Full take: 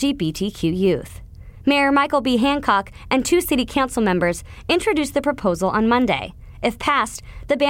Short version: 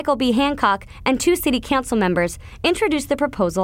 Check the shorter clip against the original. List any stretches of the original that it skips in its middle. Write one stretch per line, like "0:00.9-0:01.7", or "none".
none

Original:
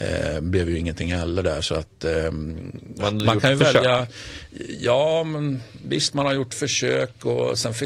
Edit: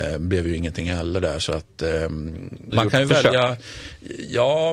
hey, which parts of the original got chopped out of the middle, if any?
0:02.9-0:03.2

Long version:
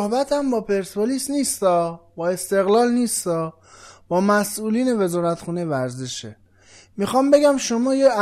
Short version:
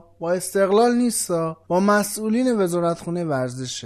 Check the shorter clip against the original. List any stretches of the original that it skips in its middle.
0:03.6-0:04.0

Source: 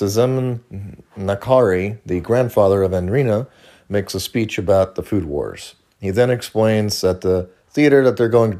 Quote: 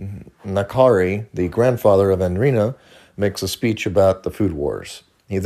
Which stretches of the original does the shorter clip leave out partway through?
none

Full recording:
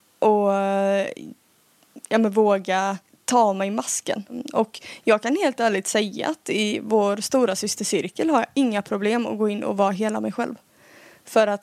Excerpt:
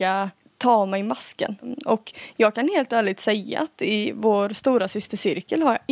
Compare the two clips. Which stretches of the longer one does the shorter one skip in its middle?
none

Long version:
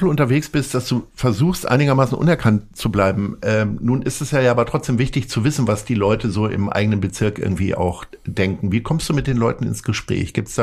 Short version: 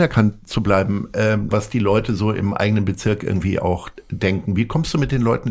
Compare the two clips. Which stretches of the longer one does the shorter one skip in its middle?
0:03.8-0:05.7

